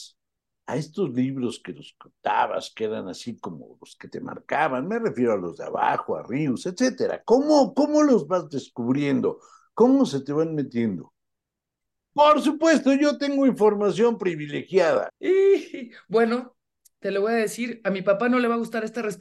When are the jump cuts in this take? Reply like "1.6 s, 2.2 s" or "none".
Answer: 12.1 s, 15.1 s